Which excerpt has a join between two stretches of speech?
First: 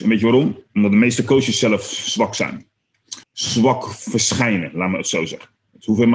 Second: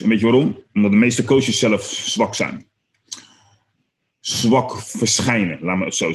first; 1 cut; at 3.2 s

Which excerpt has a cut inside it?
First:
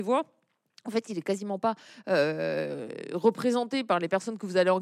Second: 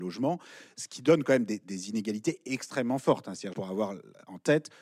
second; 1 cut; at 3.5 s

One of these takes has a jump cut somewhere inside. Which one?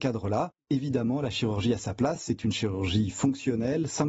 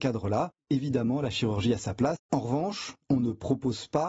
second; 1 cut; at 2.2 s

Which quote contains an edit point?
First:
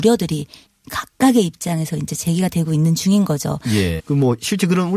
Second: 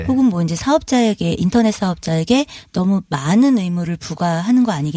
first; 1 cut; at 4.0 s

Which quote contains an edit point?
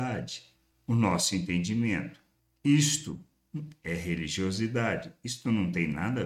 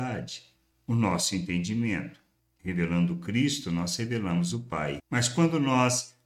second; 2 cuts; at 2.6 s, 5.0 s

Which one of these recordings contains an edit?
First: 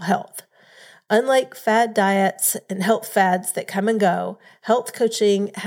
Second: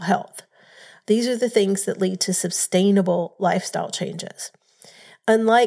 second; 1 cut; at 1.0 s

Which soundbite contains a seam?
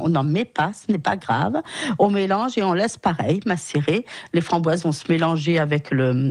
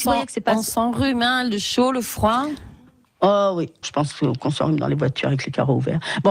second; 1 cut; at 3.8 s

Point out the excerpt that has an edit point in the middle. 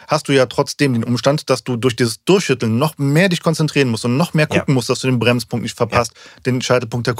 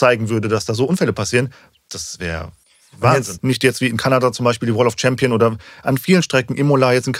second; 1 cut; at 3.4 s

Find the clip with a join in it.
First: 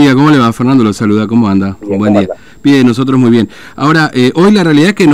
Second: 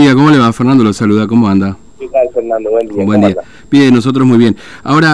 first; 1 cut; at 1.8 s

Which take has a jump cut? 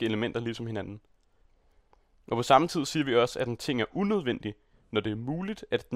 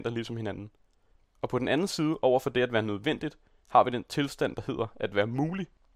second; 1 cut; at 1.2 s

